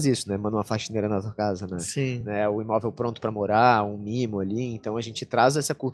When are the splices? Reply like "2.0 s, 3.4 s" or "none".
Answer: none